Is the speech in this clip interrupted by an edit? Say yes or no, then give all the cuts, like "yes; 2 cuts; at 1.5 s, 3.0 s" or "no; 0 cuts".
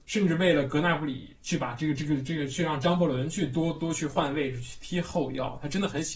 yes; 1 cut; at 3.8 s